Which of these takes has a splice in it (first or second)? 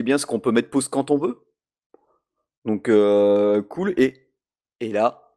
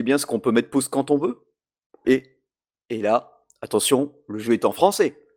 second